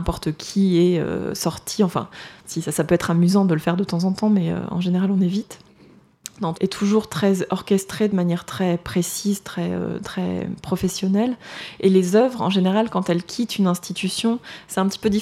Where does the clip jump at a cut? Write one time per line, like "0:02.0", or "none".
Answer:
0:02.4
0:06.5